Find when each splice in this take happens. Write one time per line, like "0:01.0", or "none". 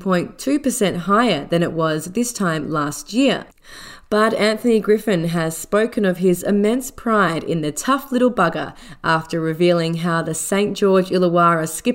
0:04.0